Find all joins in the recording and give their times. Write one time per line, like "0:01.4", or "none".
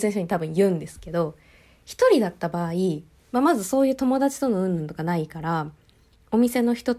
none